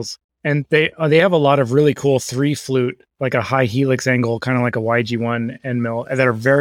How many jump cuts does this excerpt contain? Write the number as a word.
zero